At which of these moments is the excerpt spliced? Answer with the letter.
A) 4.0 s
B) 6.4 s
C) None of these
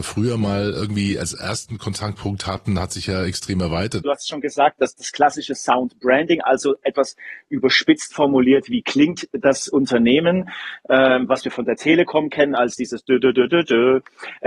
A